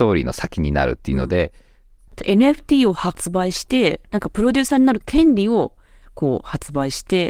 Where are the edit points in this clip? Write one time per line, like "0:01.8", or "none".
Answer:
0:02.1